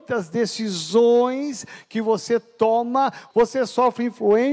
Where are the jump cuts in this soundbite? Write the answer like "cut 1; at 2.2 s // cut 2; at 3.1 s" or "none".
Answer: cut 1; at 3.3 s